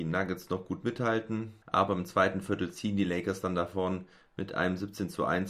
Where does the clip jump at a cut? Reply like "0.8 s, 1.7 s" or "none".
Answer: 1.6 s